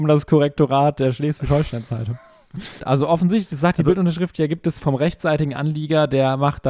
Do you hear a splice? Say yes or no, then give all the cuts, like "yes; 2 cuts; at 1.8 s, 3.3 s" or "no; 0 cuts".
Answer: yes; 2 cuts; at 2.8 s, 4.8 s